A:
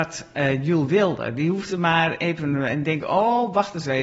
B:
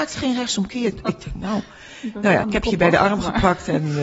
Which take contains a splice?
B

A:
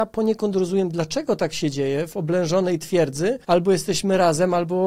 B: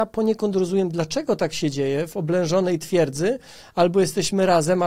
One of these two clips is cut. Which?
A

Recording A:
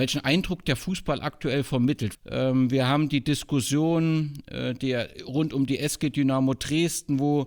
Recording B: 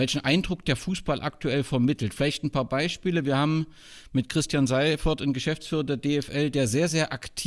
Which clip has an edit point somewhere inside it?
A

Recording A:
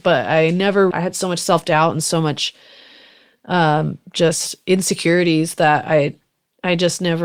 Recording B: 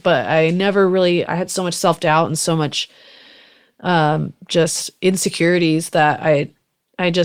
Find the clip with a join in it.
A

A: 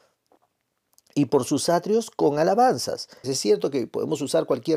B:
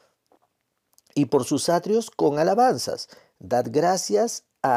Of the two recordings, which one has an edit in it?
A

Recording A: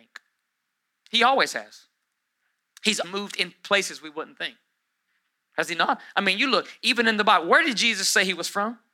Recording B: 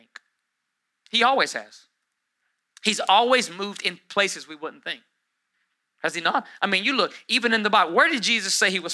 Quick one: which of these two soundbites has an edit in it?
A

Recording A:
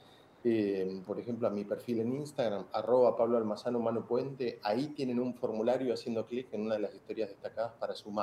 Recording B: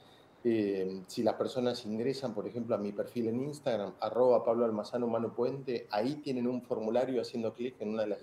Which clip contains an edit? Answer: A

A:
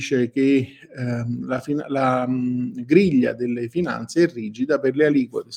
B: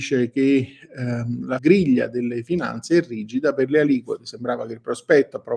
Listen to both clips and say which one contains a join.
B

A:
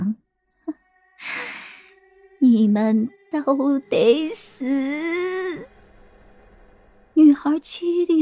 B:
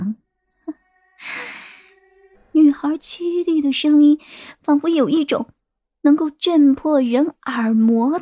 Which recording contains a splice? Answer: B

